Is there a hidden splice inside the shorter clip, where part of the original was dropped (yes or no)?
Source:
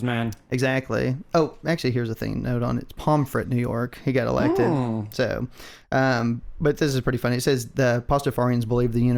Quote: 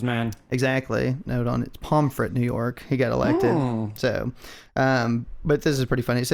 yes